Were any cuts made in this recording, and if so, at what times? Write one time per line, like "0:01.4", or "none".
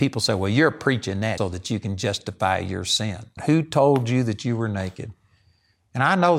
0:01.4
0:03.4